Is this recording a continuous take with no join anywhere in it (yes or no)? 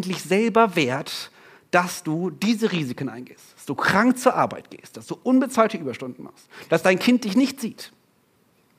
yes